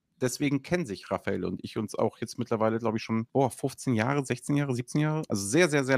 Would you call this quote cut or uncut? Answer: uncut